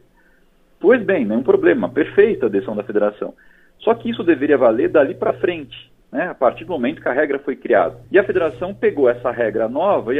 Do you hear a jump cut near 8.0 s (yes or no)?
yes